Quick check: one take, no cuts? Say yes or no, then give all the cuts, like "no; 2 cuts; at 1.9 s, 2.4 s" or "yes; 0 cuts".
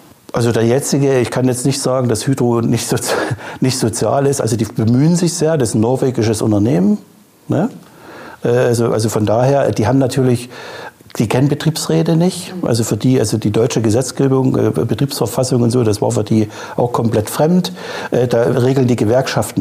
yes; 0 cuts